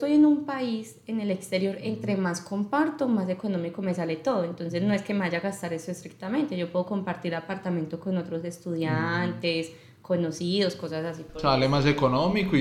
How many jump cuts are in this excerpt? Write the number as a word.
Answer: zero